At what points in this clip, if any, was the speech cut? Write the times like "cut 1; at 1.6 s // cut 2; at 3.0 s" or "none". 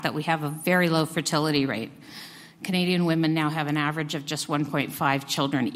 none